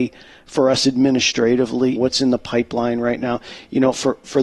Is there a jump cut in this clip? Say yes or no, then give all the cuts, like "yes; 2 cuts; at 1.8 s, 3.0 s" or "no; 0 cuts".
yes; 1 cut; at 2.0 s